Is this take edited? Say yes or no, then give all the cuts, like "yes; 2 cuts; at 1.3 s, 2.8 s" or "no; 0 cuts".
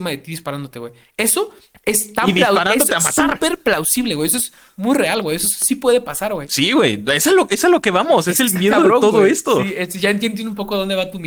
no; 0 cuts